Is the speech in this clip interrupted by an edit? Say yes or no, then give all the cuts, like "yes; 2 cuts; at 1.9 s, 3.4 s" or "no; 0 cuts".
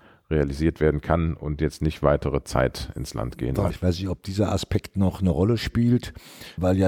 yes; 1 cut; at 3.7 s